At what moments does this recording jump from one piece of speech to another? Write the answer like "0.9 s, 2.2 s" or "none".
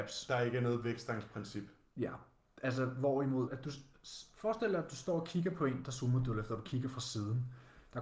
3.5 s